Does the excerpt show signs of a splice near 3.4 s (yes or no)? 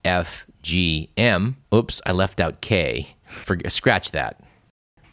yes